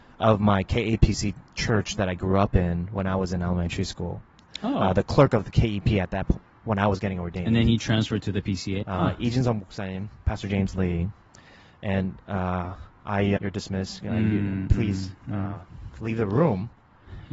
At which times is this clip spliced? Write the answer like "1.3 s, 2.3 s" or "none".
8.8 s, 13.4 s